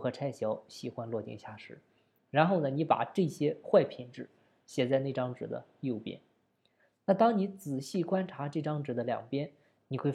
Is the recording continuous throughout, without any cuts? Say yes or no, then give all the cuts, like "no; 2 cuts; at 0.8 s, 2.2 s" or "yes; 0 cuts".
yes; 0 cuts